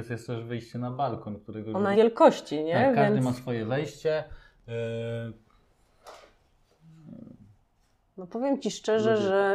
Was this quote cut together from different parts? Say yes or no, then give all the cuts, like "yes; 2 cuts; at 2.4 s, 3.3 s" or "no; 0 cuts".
yes; 1 cut; at 1.9 s